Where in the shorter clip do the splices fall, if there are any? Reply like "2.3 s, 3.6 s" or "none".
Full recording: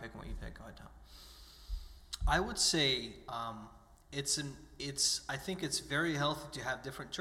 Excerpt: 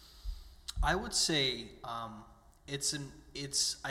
none